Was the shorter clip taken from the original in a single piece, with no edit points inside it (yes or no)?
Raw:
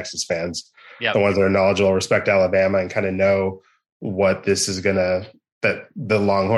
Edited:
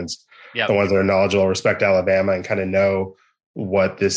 yes